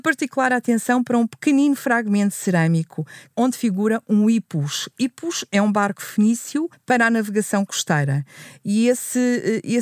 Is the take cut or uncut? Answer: uncut